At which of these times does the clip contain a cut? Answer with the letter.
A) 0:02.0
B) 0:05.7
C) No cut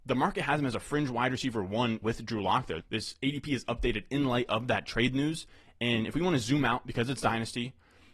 A